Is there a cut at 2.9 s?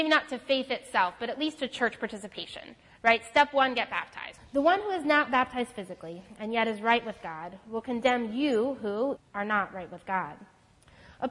no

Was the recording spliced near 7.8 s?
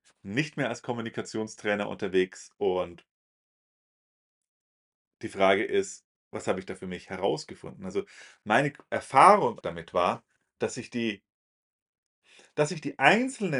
no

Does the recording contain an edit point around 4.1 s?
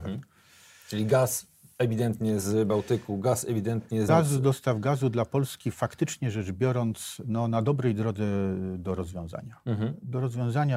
yes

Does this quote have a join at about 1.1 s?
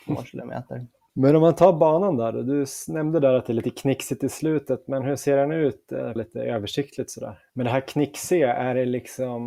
no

